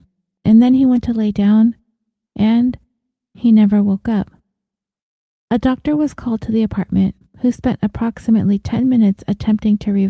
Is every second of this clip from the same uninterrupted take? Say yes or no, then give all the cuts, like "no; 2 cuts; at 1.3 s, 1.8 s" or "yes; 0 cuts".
no; 1 cut; at 5.4 s